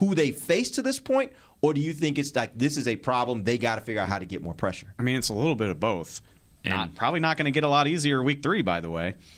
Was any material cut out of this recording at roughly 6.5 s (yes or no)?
yes